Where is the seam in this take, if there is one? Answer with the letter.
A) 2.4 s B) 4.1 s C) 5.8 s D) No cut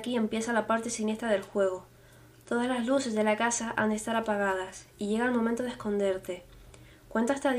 D